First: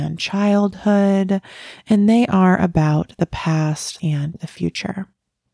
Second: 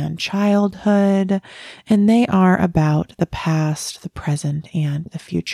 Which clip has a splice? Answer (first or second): first